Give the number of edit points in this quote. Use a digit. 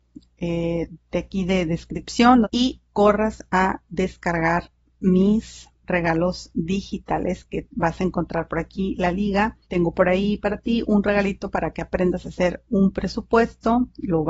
2